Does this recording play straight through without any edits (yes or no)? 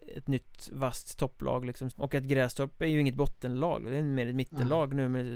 no